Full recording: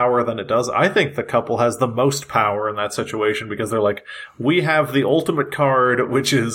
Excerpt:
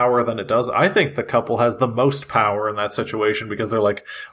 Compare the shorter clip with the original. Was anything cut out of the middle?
no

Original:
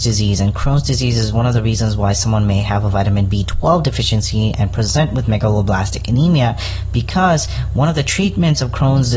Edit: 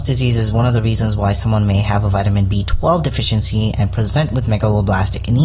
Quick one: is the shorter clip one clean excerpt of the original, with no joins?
yes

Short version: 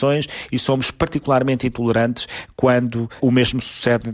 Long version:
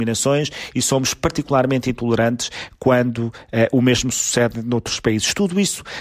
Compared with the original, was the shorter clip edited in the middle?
yes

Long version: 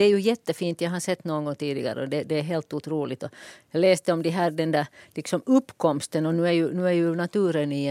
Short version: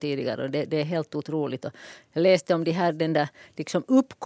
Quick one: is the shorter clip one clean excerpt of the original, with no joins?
yes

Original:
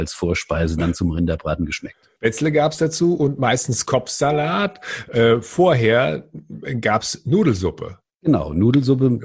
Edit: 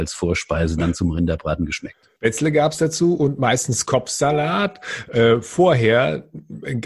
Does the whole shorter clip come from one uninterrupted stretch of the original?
yes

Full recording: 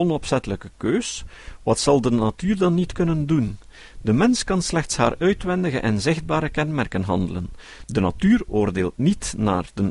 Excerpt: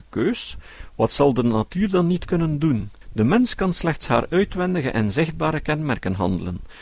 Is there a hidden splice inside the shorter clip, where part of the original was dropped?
yes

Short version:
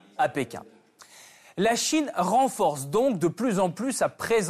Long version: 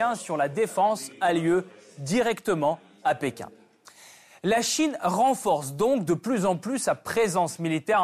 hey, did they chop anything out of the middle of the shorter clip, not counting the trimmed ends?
no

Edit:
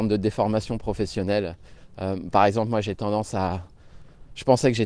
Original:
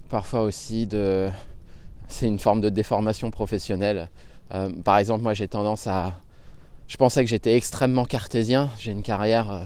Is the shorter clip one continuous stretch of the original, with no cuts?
yes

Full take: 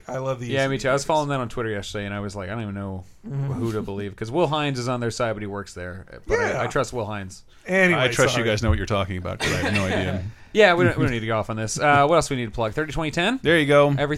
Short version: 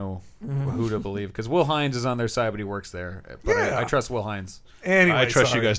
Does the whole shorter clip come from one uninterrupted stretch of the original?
yes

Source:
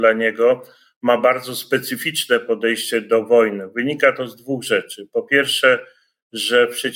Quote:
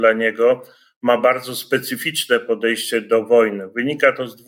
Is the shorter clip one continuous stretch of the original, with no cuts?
yes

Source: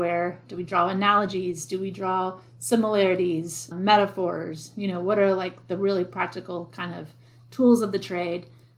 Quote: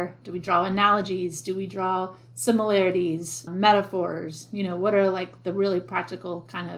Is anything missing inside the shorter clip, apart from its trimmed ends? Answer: no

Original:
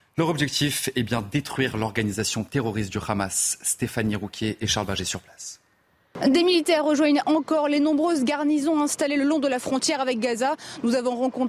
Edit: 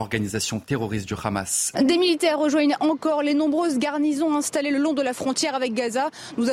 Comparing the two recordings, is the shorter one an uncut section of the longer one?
no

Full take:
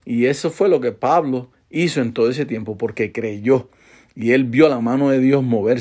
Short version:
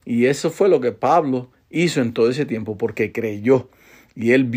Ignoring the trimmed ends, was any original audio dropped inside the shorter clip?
no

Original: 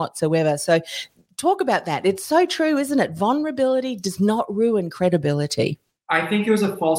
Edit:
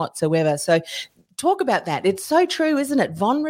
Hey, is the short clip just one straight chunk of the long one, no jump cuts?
yes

